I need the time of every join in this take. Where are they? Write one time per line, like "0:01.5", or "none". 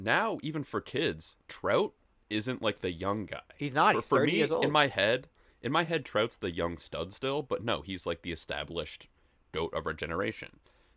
none